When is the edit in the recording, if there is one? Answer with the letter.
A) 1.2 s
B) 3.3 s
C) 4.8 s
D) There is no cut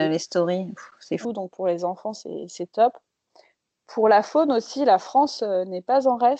A